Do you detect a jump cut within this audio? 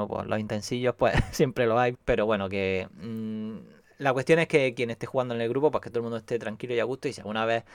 yes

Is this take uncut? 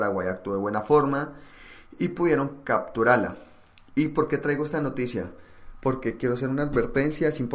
yes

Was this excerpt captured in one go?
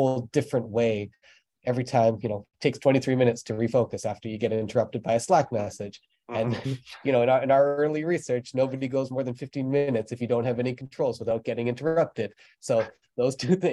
yes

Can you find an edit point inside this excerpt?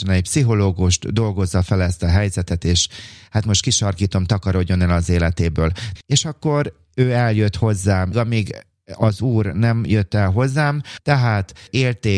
yes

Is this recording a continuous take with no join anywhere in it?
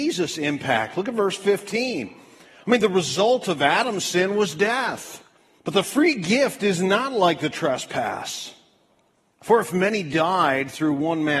no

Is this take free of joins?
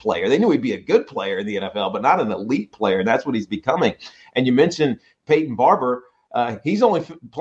yes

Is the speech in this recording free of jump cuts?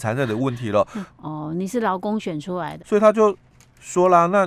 no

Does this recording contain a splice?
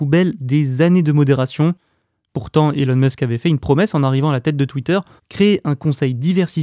yes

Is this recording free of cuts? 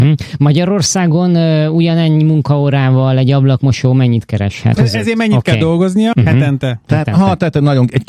no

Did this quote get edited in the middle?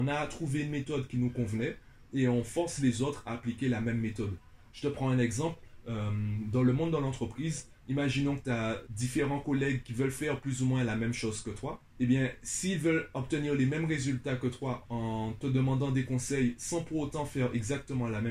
no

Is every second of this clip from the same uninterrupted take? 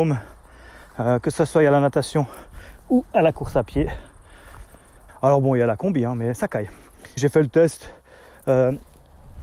no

